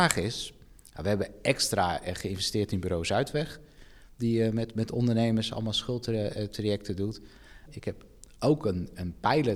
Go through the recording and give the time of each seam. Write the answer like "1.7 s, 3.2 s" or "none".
7.7 s